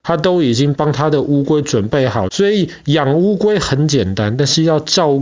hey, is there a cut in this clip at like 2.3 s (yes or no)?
yes